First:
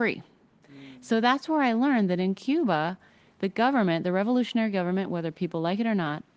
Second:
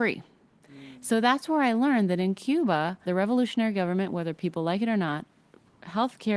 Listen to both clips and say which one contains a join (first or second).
second